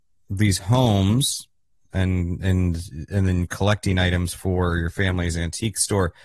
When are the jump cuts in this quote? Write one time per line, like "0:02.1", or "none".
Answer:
none